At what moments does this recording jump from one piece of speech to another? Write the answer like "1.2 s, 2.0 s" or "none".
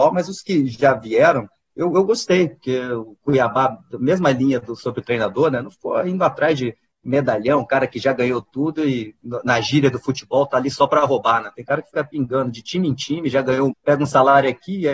13.7 s